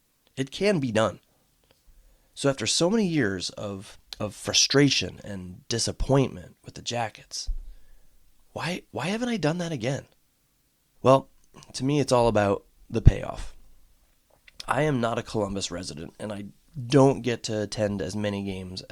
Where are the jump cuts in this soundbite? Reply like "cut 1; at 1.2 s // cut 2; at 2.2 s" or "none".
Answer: cut 1; at 4.1 s // cut 2; at 10.9 s // cut 3; at 14.6 s